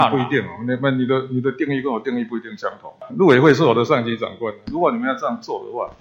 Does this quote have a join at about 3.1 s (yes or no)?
yes